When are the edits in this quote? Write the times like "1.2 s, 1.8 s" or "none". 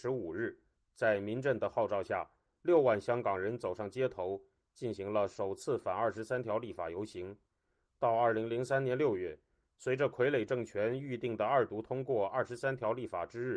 none